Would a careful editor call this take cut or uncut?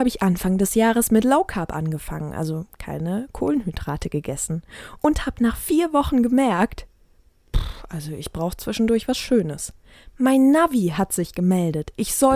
uncut